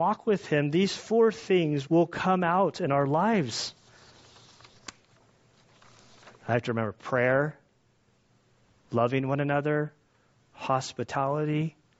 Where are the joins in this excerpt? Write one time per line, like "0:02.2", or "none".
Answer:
0:01.8
0:06.3